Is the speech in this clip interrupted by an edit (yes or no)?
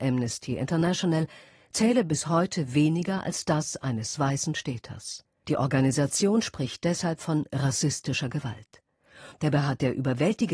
yes